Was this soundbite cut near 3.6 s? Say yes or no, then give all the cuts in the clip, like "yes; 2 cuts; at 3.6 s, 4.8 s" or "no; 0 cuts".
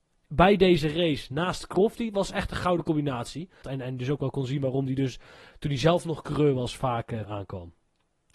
yes; 2 cuts; at 3.6 s, 7.2 s